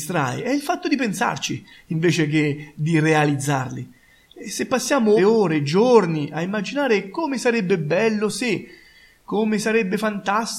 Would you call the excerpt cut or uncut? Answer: cut